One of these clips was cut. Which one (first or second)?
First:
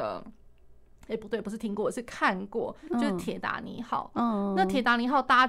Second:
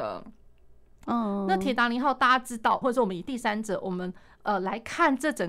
second